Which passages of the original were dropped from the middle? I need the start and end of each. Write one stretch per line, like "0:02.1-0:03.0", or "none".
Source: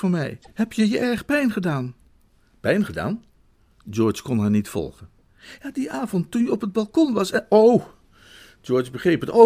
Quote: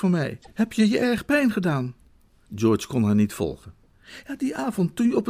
0:02.5-0:03.8